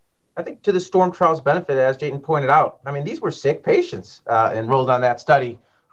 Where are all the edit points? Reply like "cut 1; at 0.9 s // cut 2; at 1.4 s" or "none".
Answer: none